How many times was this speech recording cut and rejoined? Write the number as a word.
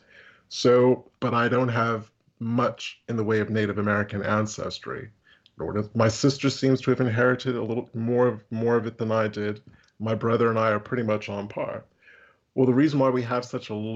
one